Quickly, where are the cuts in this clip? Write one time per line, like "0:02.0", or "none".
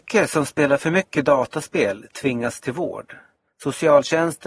0:03.5